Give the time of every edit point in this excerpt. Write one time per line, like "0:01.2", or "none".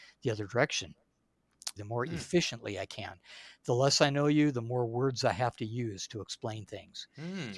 0:01.8